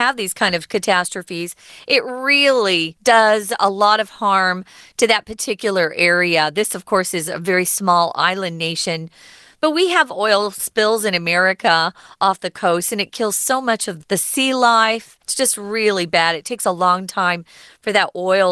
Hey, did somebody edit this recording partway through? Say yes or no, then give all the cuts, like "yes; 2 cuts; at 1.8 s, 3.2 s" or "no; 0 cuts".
yes; 2 cuts; at 14.0 s, 15.2 s